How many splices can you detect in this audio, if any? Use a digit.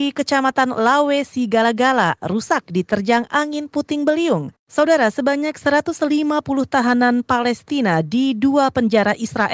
2